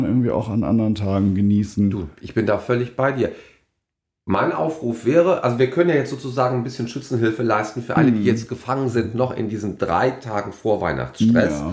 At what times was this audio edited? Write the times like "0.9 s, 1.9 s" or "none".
none